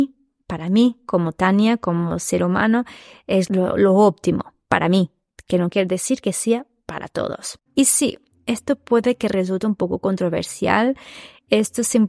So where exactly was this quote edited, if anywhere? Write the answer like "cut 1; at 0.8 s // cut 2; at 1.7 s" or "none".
cut 1; at 3.5 s // cut 2; at 7.7 s